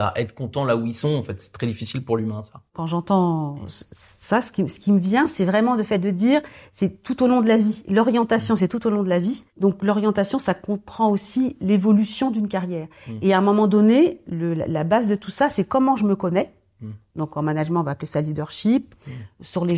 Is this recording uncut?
yes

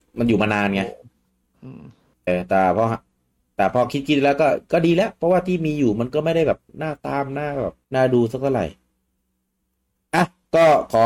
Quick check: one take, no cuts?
no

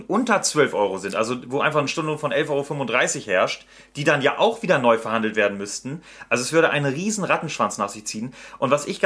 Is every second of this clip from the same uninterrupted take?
yes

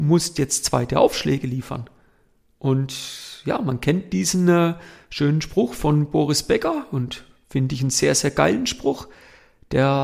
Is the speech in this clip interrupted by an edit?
no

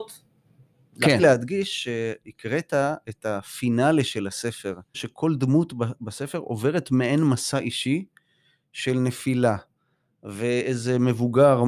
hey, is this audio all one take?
no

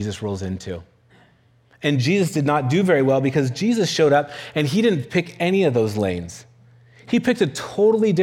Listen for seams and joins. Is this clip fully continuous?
yes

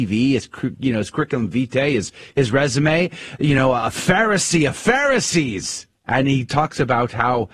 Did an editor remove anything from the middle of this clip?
yes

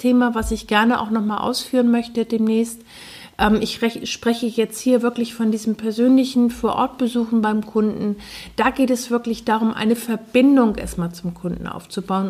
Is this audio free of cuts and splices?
yes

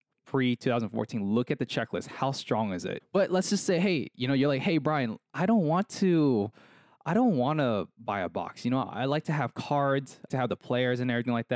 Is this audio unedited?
no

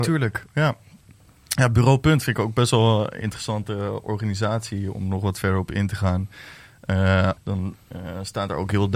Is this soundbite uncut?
no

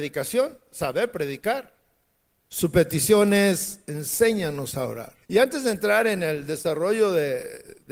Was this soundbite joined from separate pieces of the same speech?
yes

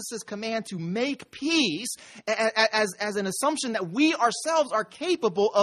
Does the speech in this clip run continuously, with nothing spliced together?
yes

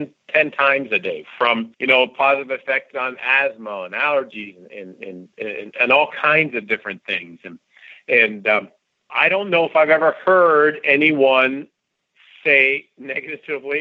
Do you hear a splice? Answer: no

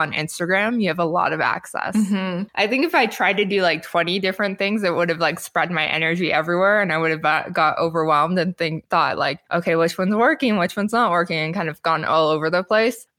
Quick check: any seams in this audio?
yes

